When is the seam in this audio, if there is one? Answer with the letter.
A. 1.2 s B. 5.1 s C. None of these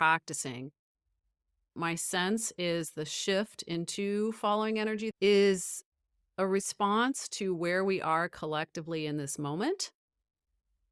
B